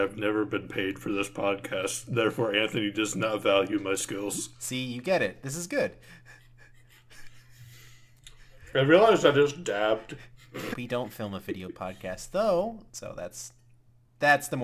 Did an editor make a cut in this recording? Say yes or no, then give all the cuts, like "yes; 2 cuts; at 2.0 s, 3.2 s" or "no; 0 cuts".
yes; 2 cuts; at 10.7 s, 12.9 s